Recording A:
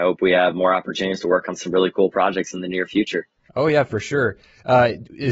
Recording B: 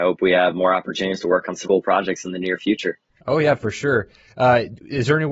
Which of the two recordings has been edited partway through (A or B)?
B